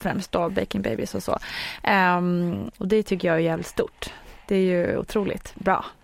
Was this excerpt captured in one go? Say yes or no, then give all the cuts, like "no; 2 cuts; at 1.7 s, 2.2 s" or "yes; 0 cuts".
no; 1 cut; at 2.7 s